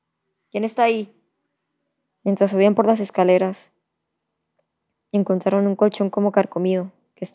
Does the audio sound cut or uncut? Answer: cut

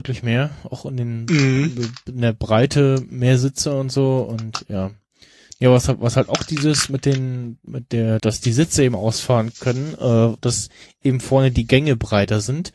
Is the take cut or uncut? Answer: cut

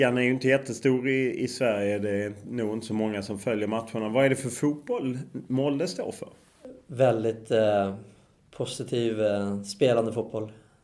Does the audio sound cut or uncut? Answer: uncut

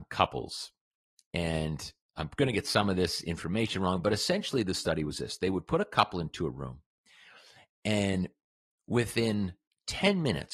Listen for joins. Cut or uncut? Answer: uncut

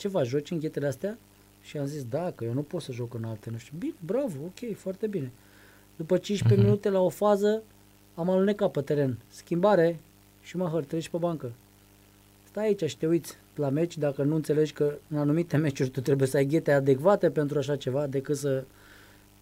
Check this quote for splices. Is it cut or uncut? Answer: uncut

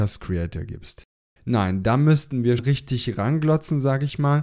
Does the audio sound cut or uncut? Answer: cut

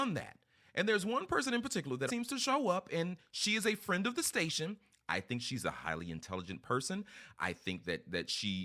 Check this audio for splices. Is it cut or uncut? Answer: cut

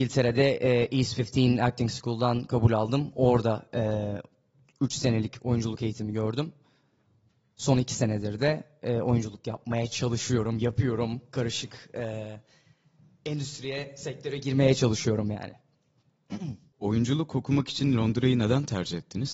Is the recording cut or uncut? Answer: cut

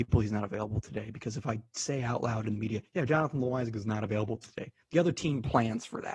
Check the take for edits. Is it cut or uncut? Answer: uncut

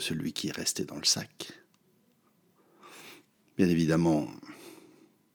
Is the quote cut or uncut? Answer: uncut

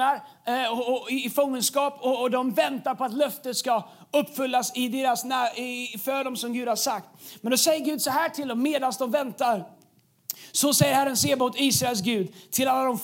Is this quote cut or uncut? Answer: uncut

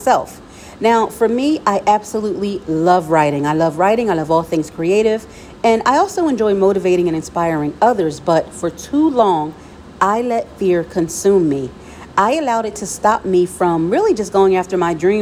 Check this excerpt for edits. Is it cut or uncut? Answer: uncut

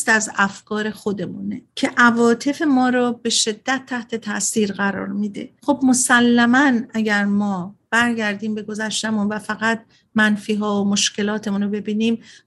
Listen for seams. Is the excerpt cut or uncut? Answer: cut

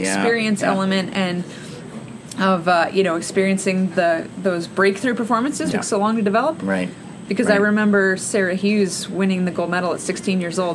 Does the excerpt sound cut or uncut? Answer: cut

